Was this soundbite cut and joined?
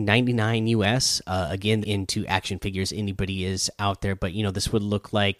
yes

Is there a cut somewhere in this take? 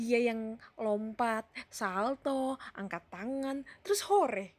yes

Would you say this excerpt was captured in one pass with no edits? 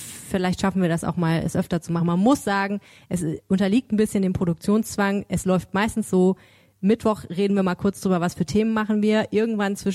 yes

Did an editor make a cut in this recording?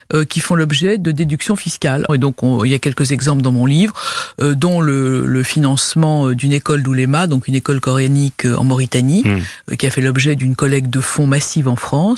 yes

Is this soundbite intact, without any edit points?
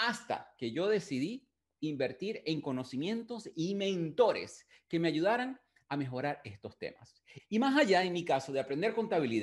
no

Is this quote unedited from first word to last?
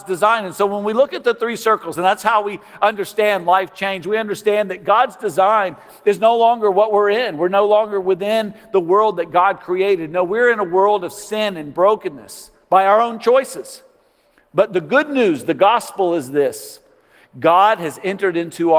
yes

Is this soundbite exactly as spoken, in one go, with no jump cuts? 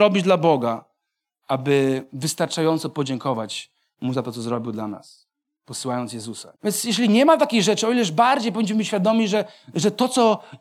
no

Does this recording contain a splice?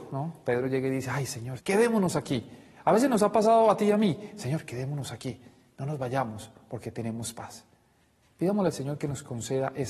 yes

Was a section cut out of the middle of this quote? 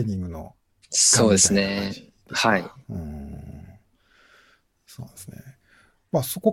no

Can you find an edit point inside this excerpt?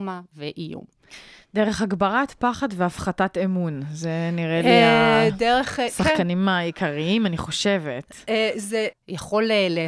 yes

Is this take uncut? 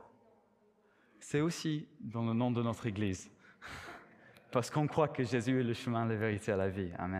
yes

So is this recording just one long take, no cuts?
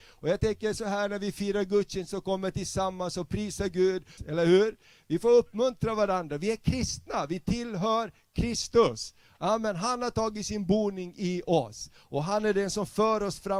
no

